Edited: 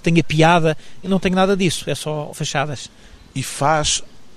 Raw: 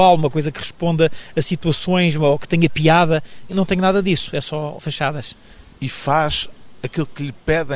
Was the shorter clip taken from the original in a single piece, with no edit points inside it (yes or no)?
yes